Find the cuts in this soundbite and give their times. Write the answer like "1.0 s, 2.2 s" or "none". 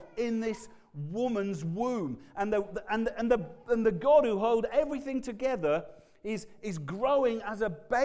none

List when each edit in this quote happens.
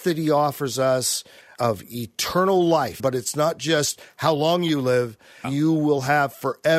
3.0 s, 5.4 s

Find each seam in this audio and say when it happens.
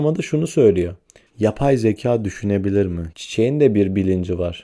1.3 s, 3.1 s

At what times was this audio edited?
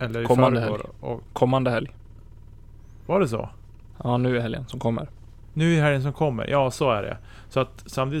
none

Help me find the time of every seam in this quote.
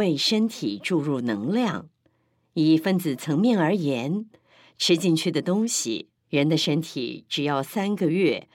6.2 s

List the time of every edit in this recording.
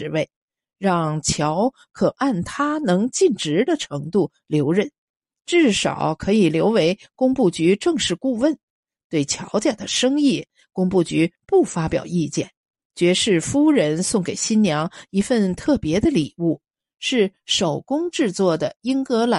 12.8 s

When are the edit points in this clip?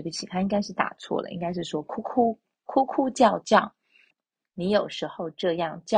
4.1 s

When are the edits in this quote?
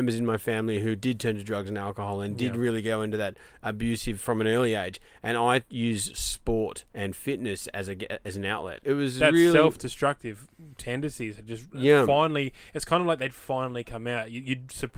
6.9 s, 8.8 s

